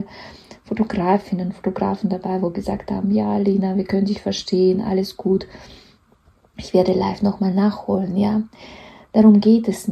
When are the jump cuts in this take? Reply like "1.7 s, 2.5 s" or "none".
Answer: none